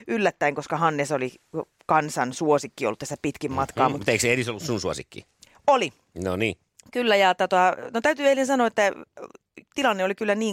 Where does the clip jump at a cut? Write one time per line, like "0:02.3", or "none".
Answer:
none